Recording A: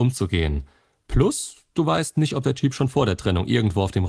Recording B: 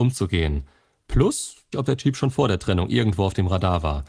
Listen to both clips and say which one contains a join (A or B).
B